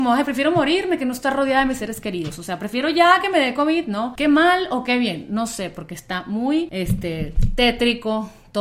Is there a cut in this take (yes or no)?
no